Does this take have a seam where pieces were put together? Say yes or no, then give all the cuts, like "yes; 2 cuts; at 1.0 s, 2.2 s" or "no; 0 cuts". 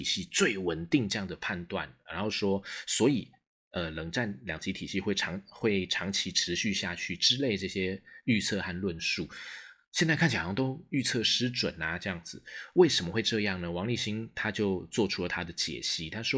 no; 0 cuts